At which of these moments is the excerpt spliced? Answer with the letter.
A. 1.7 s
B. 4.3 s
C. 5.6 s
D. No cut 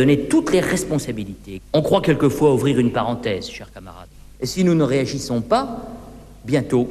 B